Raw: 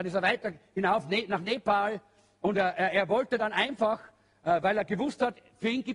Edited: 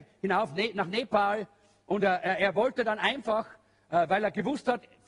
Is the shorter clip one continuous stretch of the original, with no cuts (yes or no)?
yes